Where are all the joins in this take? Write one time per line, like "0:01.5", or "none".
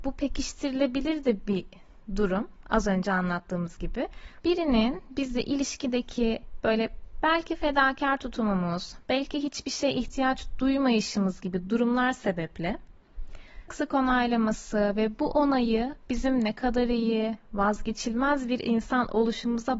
0:04.4
0:13.7